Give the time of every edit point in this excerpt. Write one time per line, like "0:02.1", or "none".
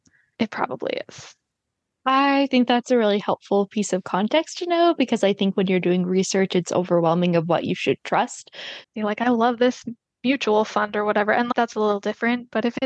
0:08.8